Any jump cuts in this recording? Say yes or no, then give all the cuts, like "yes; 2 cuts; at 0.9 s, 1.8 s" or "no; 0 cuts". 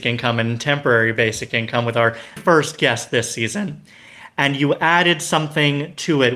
yes; 1 cut; at 2.4 s